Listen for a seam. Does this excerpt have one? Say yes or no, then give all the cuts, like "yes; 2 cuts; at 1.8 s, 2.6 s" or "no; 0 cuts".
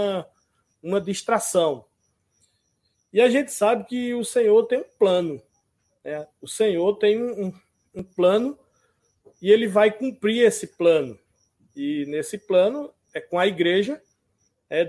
no; 0 cuts